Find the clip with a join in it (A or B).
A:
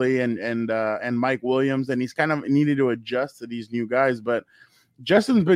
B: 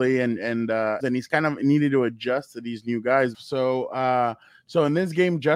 B